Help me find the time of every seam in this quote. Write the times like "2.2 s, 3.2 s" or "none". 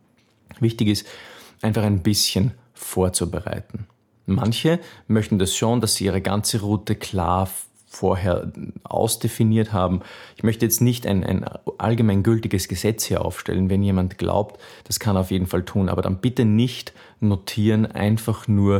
14.8 s